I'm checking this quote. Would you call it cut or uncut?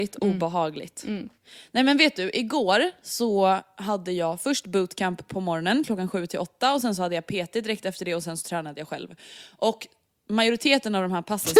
uncut